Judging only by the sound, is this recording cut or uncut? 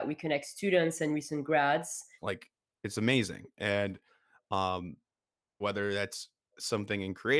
cut